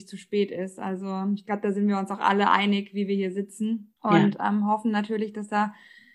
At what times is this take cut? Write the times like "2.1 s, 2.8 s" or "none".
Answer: 4.0 s